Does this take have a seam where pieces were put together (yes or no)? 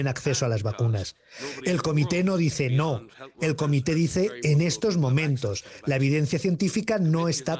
no